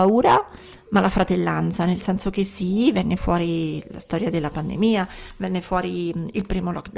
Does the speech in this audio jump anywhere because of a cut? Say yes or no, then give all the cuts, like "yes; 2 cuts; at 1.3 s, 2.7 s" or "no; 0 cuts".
no; 0 cuts